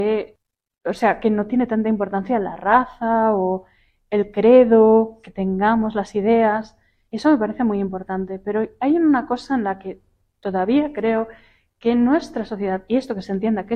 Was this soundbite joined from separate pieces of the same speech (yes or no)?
no